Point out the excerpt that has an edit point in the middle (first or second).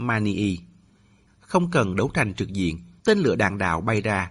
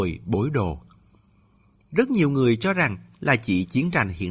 first